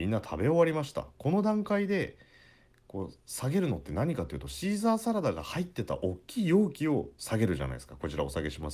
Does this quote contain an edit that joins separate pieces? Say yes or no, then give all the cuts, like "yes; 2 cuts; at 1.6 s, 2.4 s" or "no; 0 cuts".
no; 0 cuts